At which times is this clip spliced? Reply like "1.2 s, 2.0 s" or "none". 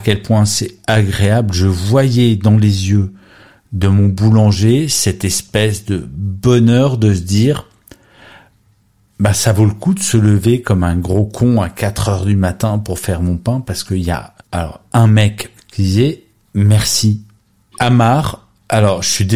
14.4 s, 15.6 s, 17.7 s

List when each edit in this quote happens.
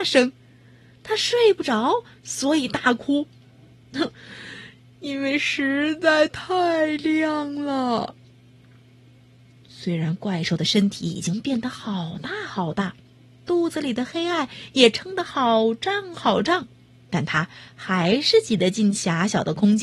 3.8 s

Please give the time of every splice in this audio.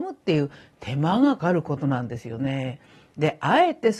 1.4 s

